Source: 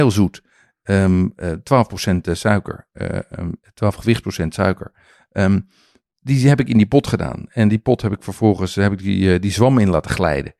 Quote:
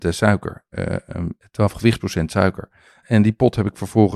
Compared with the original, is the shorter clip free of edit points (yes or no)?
no